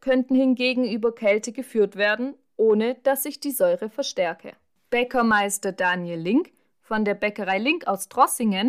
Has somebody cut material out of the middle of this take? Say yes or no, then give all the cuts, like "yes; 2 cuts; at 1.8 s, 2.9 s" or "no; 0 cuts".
no; 0 cuts